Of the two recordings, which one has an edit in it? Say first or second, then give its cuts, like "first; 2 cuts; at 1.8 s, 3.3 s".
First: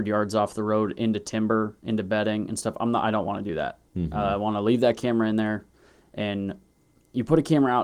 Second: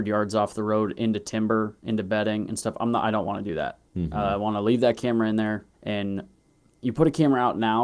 second; 1 cut; at 5.7 s